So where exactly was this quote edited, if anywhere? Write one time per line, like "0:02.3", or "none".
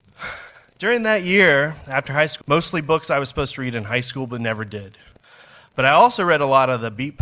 0:02.4